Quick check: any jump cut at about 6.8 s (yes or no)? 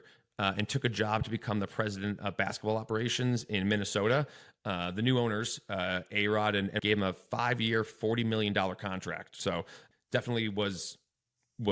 yes